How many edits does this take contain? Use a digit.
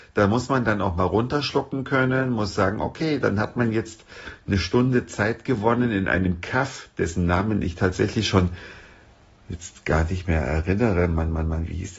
0